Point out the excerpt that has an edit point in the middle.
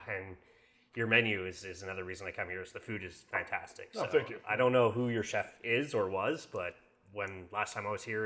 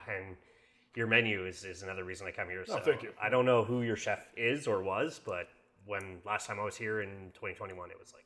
second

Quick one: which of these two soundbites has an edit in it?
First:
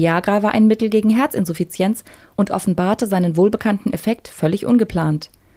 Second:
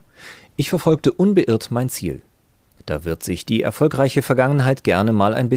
second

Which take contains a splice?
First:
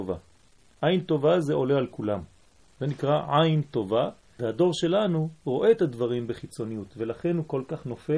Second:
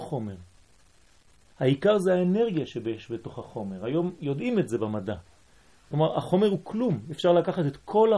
first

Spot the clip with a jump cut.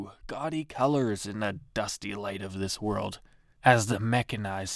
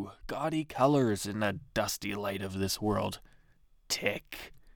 first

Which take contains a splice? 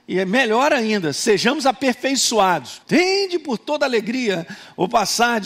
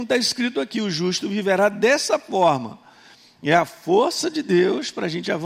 first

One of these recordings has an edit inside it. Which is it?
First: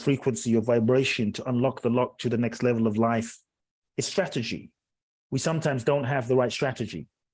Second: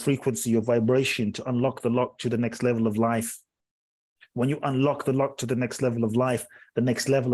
first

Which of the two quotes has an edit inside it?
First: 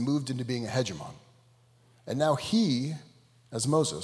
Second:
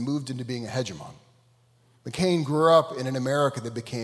first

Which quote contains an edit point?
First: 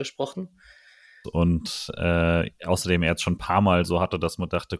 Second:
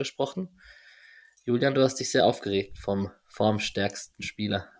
first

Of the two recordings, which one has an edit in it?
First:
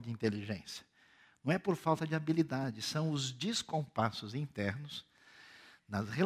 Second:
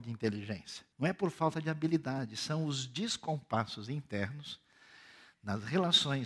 second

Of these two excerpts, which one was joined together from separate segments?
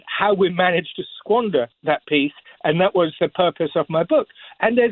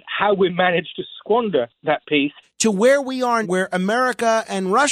second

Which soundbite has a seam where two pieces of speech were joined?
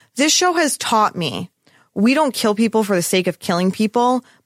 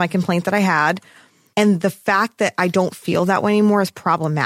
second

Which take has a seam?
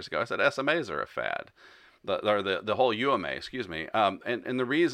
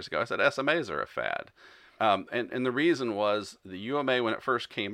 second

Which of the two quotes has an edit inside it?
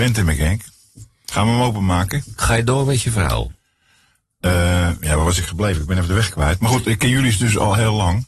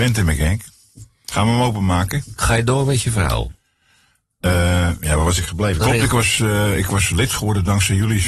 second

